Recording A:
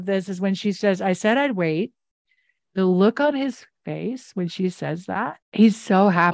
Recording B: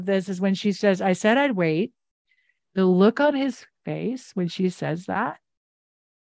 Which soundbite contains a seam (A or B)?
A